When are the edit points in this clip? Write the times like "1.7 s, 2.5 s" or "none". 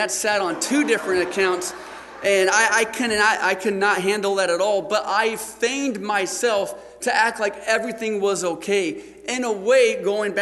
none